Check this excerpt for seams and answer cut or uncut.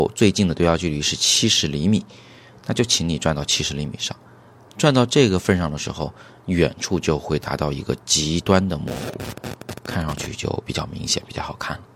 uncut